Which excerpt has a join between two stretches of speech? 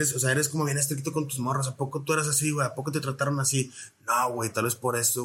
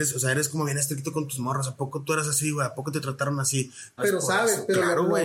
second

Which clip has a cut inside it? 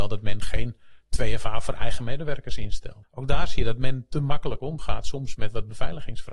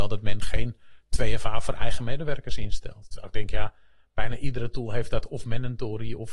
first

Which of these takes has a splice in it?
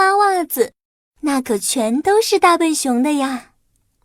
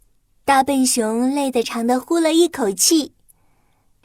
second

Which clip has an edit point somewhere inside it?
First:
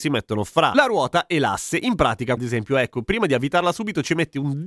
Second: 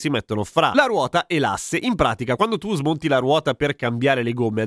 first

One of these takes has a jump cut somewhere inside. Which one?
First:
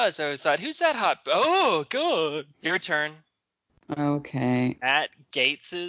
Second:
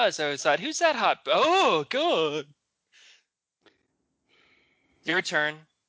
first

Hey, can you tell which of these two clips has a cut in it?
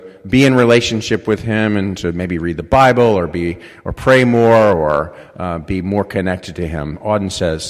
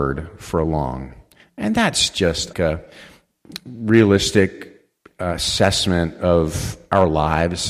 second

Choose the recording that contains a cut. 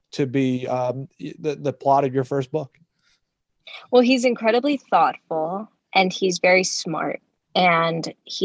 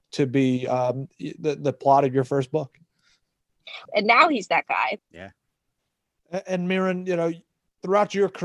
second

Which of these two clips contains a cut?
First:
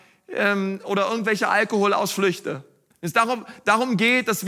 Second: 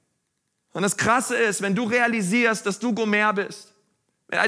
first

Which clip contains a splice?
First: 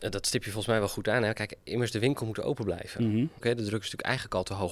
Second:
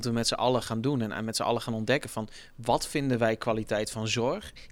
first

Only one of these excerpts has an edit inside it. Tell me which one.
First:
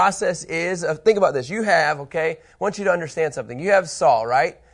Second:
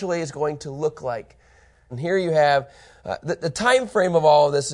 second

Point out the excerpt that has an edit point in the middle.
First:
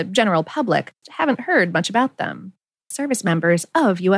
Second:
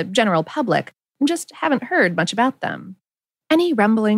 first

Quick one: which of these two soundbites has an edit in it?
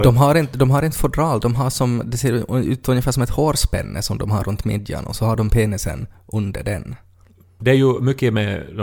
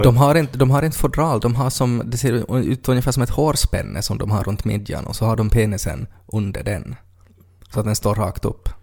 first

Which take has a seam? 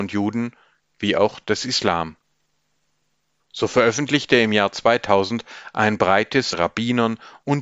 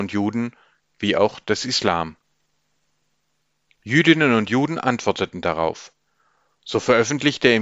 first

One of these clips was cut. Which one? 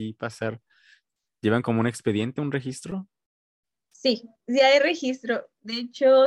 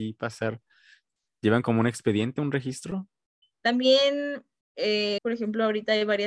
second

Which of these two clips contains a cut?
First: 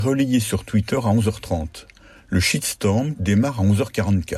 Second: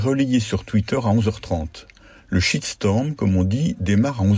first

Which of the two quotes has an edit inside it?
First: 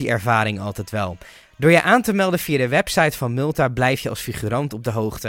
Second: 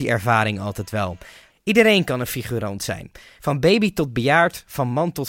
second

